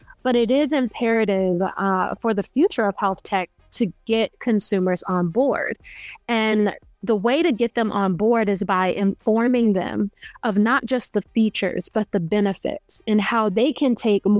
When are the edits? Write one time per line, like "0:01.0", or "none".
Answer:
none